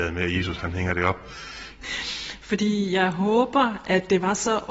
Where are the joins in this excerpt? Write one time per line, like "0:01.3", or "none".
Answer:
0:01.8